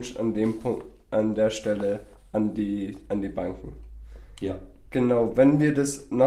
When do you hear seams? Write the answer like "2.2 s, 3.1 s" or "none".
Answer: none